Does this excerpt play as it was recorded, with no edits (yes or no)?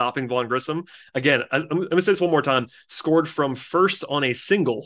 yes